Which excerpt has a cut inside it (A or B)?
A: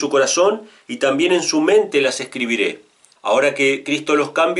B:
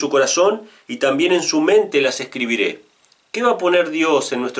A